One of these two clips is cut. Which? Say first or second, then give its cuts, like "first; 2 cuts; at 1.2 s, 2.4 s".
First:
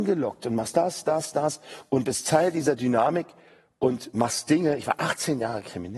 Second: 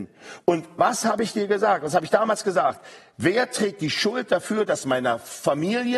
first; 1 cut; at 1.0 s